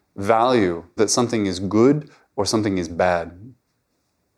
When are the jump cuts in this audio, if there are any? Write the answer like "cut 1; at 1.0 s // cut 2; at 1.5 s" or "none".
cut 1; at 1.0 s

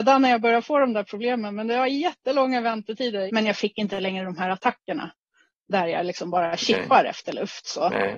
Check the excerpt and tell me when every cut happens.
cut 1; at 3.3 s

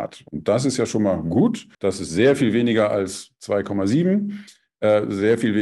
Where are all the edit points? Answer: cut 1; at 1.7 s

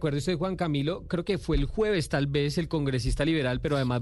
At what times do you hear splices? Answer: none

